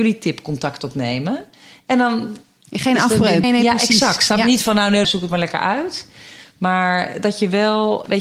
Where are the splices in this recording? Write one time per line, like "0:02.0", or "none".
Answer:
0:03.4
0:05.0